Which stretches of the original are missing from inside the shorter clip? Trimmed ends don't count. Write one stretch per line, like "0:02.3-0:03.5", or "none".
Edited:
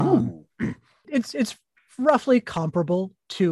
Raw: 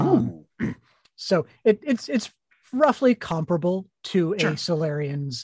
0:01.0-0:01.8